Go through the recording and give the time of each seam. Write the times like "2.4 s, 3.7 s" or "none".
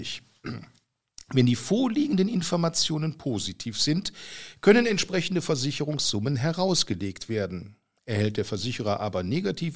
none